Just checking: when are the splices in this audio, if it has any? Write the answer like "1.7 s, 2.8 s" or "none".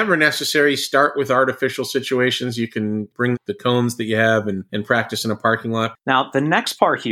5.9 s